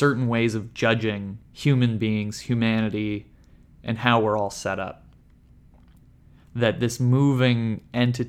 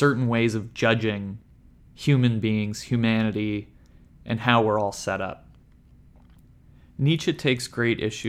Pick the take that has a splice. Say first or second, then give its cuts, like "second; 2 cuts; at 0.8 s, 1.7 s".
first; 2 cuts; at 1.4 s, 6.4 s